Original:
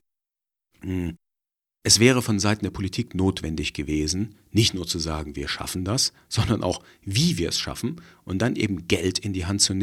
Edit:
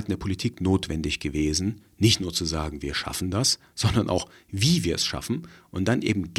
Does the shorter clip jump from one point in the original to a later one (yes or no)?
no